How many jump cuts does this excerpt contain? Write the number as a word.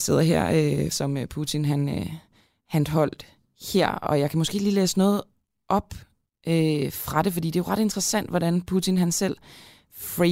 one